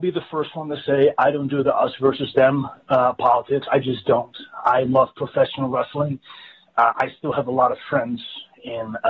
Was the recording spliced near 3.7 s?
no; 0 cuts

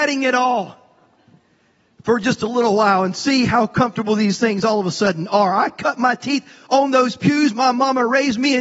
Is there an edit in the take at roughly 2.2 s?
no; 0 cuts

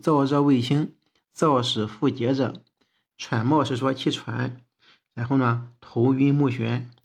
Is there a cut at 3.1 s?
yes; 1 cut; at 3.1 s

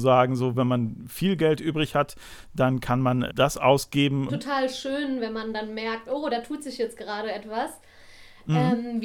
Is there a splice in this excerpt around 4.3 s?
yes; 2 cuts; at 3.3 s, 4.3 s

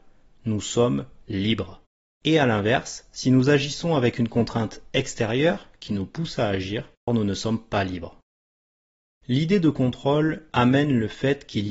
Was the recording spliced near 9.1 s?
no; 1 cut; at 7.1 s

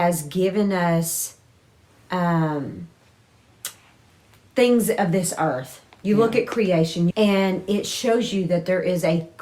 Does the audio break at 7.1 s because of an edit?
yes; 1 cut; at 7.1 s

